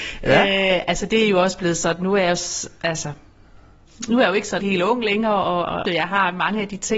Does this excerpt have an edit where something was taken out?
yes; 2 cuts; at 4.6 s, 5.8 s

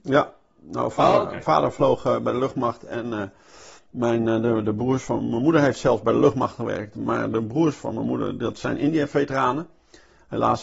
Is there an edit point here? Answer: no; 0 cuts

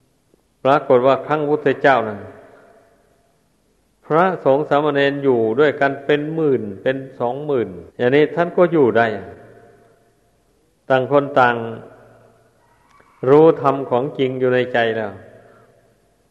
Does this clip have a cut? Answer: yes; 1 cut; at 7.9 s

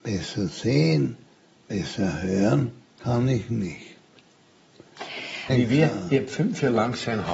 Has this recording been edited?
yes; 1 cut; at 5.5 s

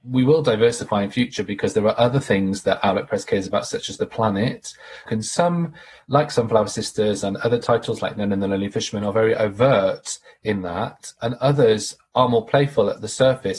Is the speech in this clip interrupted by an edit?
yes; 1 cut; at 5.1 s

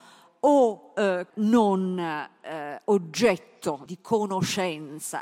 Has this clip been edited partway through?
yes; 2 cuts; at 1.3 s, 3.9 s

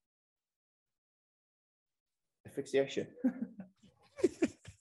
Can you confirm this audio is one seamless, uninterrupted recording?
yes; 0 cuts

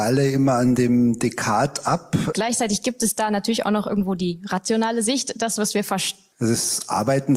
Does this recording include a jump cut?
yes; 2 cuts; at 2.3 s, 6.3 s

